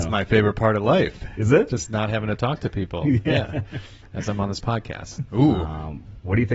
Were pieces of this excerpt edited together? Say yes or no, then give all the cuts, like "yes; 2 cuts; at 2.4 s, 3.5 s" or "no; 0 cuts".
yes; 1 cut; at 5.3 s